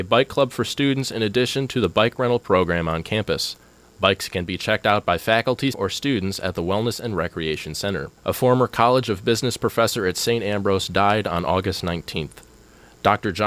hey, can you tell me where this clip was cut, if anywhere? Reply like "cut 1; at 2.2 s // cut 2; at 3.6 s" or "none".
cut 1; at 5.7 s // cut 2; at 8.2 s

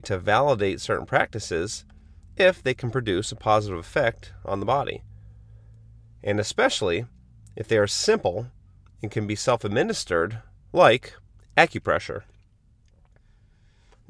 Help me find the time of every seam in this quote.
none

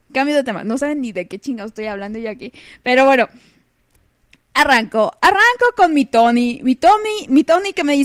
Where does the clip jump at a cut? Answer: none

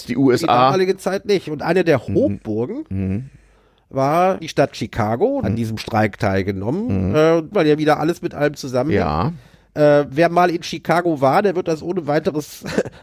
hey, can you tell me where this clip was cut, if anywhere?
cut 1; at 4.4 s // cut 2; at 5.4 s // cut 3; at 7.5 s

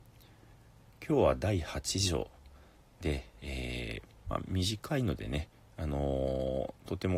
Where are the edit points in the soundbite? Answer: none

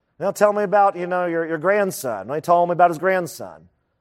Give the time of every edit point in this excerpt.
none

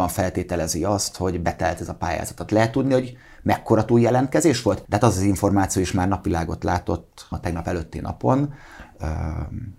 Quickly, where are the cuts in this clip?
cut 1; at 4.9 s // cut 2; at 7.3 s

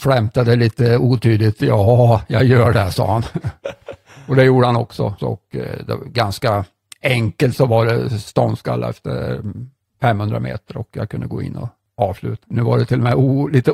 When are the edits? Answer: cut 1; at 5.2 s // cut 2; at 12.4 s

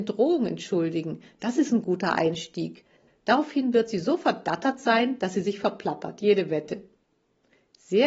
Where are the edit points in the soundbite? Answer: none

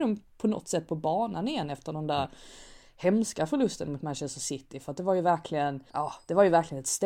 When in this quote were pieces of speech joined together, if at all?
cut 1; at 5.9 s

